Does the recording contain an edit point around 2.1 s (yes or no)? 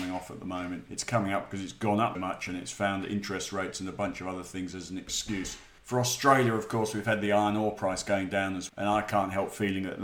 yes